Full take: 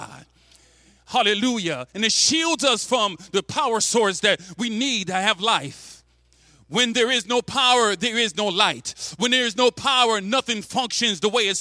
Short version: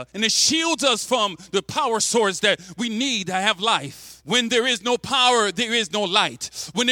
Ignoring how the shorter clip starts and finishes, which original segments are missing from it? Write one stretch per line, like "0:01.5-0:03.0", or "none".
0:06.0-0:06.6